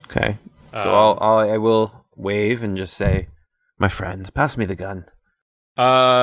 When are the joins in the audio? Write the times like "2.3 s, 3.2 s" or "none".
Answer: none